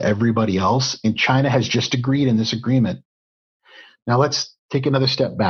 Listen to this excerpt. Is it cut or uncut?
uncut